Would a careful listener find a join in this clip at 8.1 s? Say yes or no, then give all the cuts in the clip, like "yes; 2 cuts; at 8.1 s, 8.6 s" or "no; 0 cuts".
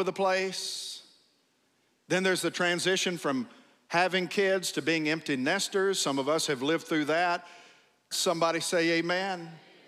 yes; 1 cut; at 8.1 s